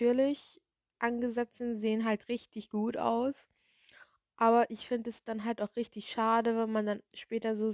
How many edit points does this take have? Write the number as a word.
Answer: zero